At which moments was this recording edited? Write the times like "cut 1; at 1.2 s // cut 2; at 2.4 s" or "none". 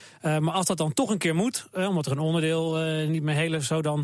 none